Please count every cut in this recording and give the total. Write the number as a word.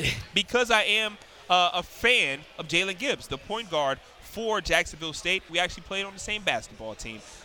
one